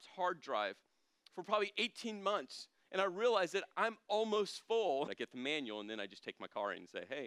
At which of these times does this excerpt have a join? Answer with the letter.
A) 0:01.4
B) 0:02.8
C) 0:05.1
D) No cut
C